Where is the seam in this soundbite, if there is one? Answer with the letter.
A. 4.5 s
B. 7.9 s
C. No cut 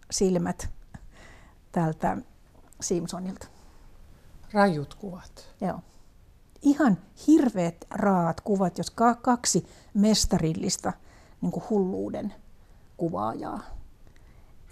B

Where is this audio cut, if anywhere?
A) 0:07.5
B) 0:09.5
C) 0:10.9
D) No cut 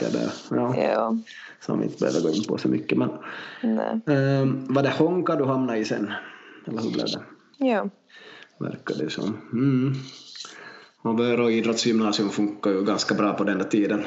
A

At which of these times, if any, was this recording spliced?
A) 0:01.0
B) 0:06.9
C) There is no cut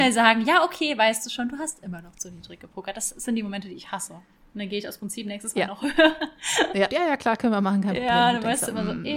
B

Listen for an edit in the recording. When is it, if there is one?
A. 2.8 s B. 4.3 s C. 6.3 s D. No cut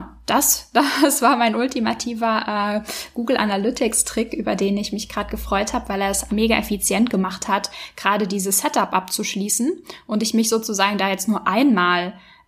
C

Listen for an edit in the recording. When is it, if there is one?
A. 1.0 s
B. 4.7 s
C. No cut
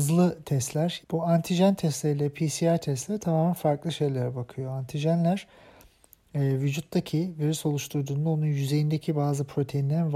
A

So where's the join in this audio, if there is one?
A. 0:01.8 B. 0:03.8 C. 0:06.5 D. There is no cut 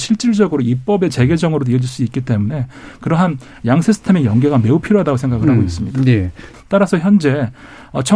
C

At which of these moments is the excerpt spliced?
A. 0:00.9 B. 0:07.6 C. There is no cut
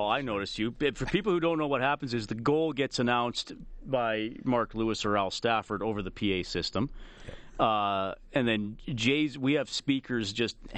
C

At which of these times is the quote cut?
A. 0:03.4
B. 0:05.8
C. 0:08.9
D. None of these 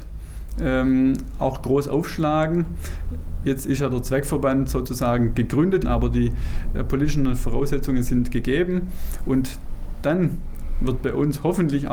B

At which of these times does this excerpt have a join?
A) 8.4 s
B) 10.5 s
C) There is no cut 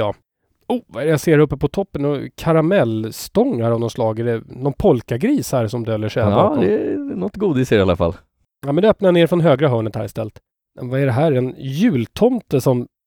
C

